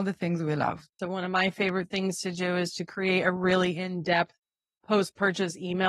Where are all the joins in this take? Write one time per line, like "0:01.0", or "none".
0:01.0